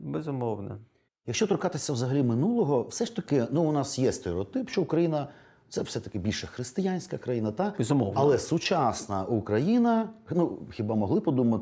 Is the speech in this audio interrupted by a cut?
no; 0 cuts

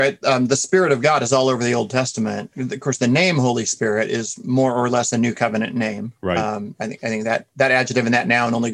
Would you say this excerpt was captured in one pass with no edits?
yes; 0 cuts

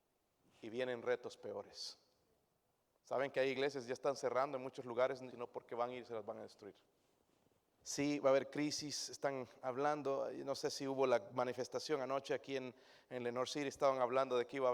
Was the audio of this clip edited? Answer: yes; 3 cuts; at 3.0 s, 5.3 s, 7.8 s

